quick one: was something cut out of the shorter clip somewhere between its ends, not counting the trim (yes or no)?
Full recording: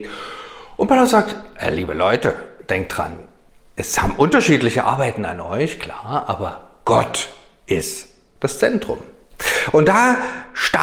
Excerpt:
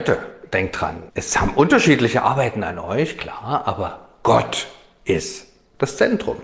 yes